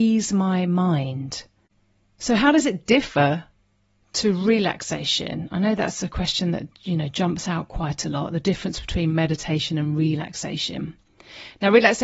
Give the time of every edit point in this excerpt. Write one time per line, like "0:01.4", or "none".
none